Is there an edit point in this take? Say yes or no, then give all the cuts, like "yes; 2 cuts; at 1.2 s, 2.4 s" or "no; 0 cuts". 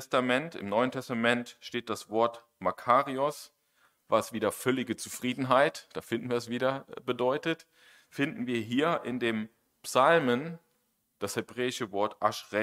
no; 0 cuts